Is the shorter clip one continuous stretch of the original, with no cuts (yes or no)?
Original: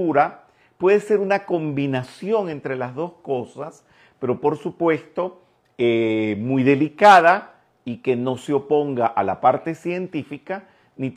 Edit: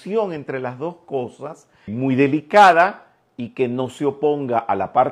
no